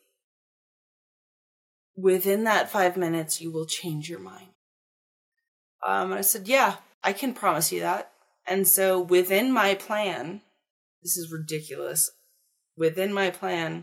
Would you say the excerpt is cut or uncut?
uncut